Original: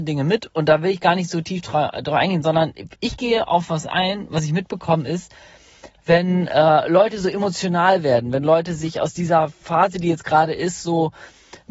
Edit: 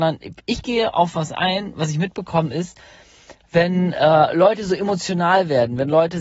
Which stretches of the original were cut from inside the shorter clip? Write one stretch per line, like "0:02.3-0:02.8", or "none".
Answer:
none